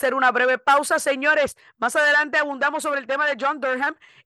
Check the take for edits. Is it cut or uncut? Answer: uncut